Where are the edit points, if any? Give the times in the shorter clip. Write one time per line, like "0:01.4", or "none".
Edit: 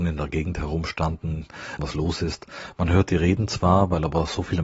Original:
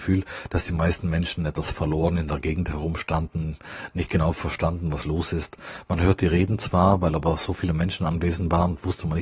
0:01.8